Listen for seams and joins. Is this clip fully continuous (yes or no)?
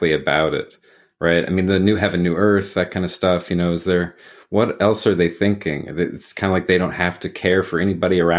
yes